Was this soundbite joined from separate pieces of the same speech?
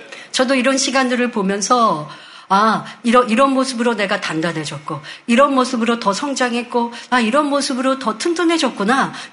no; 0 cuts

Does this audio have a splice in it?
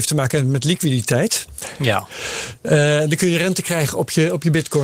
no; 0 cuts

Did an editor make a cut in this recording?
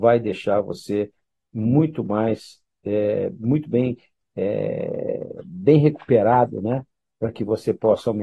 no; 0 cuts

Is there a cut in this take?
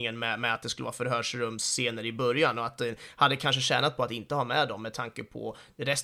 no; 0 cuts

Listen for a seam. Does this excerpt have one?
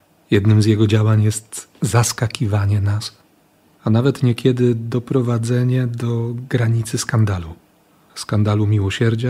no; 0 cuts

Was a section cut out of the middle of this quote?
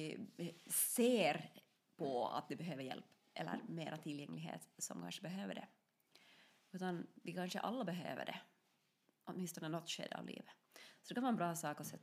no; 0 cuts

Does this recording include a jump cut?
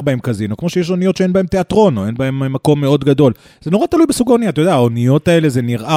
no; 0 cuts

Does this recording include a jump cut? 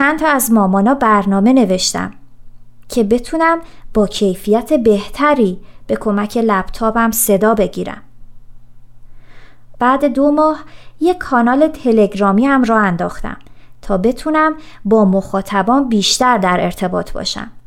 yes; 2 cuts; at 2.8 s, 9.7 s

